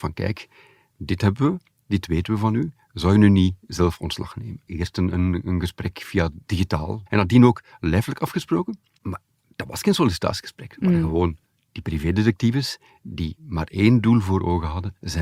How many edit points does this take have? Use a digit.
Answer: 2